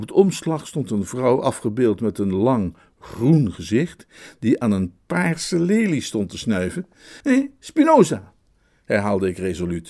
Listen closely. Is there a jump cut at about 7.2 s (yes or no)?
yes